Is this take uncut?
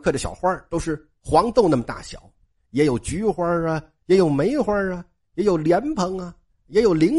yes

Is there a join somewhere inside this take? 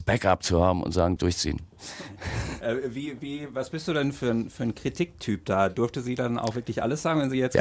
yes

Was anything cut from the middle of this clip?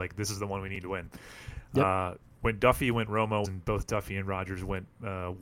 yes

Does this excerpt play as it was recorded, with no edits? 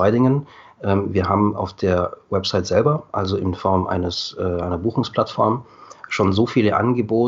yes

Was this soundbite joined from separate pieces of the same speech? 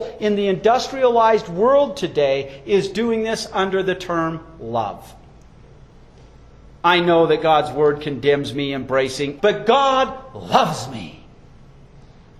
yes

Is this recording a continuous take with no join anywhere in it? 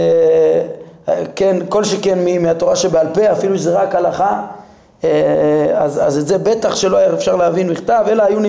yes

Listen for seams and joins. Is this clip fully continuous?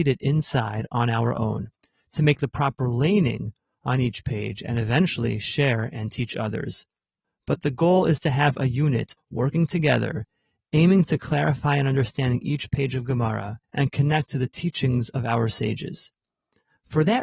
no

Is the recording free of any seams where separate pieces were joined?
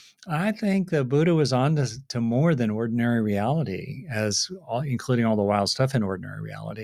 yes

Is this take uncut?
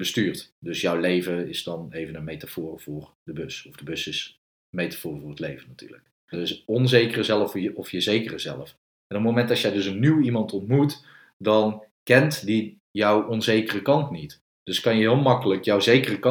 no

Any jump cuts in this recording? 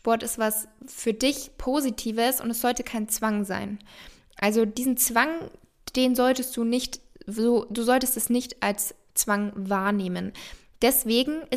no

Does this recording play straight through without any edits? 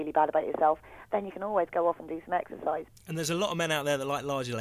no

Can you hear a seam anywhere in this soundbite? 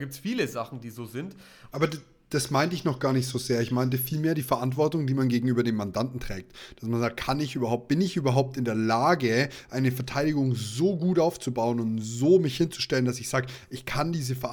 yes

